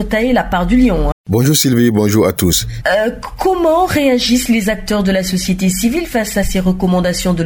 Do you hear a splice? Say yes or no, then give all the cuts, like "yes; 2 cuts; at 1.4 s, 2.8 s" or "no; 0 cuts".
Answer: yes; 2 cuts; at 1.1 s, 2.8 s